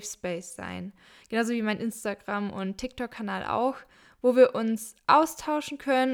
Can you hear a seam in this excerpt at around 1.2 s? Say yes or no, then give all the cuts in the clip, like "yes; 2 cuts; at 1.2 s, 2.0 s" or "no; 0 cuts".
no; 0 cuts